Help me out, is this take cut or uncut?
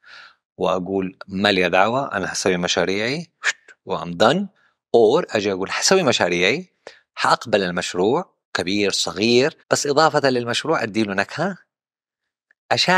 cut